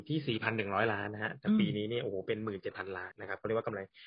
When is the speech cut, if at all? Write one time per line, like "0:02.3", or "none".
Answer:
0:03.1